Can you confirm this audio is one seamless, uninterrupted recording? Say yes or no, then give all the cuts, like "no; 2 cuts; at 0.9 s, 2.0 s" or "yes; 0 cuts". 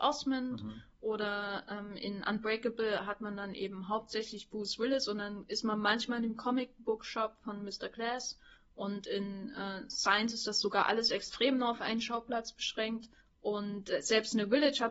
yes; 0 cuts